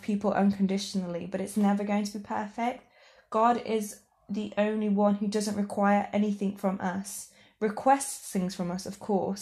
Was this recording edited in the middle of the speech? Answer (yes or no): no